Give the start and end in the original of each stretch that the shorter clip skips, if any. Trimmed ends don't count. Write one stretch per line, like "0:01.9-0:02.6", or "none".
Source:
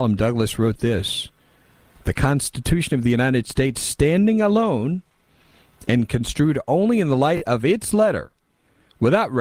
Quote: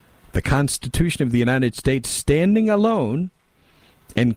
none